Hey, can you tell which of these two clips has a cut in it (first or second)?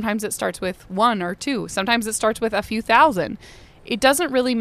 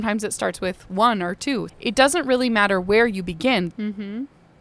second